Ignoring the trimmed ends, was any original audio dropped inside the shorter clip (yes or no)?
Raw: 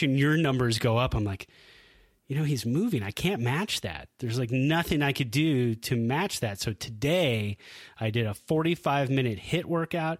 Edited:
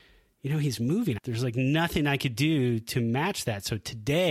yes